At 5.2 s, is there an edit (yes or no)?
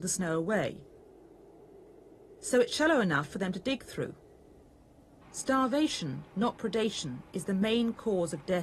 yes